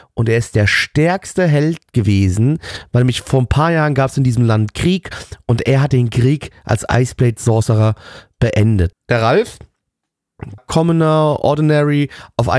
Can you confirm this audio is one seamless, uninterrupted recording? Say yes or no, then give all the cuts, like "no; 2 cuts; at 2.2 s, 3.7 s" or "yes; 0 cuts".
no; 2 cuts; at 8.9 s, 10.6 s